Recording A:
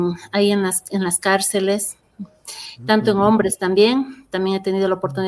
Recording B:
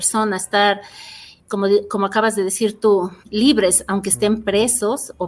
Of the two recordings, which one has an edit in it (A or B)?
B